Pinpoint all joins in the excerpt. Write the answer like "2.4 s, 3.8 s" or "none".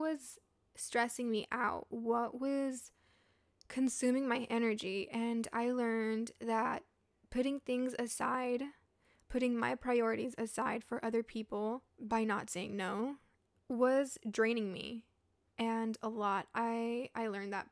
11.9 s